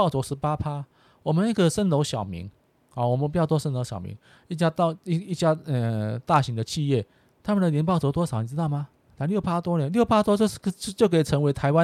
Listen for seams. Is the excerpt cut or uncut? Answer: uncut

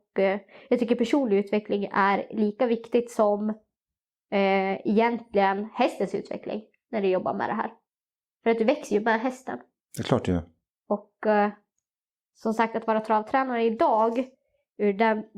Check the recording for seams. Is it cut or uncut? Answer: uncut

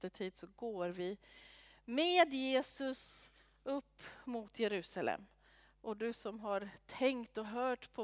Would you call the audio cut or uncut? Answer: uncut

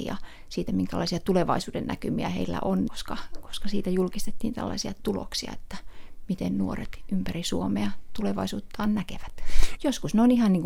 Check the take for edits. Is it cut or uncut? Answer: cut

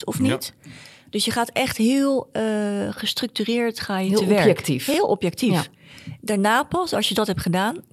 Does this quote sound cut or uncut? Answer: uncut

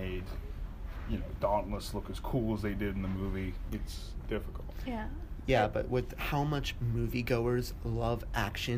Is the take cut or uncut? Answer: cut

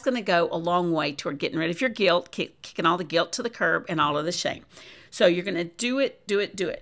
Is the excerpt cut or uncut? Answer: uncut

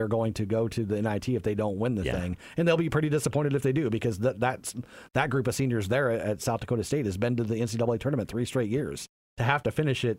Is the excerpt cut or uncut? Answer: uncut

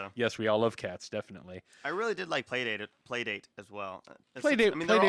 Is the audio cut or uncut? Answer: uncut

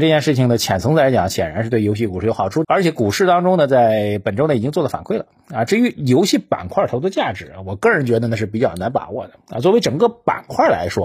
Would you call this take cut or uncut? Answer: cut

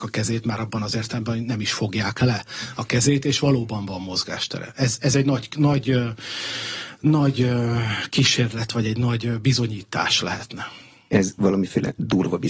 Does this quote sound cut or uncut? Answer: uncut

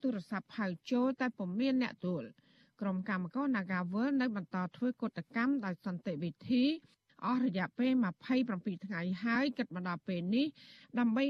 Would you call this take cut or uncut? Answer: cut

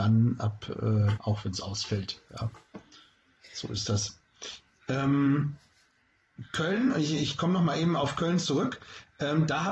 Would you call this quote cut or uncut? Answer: cut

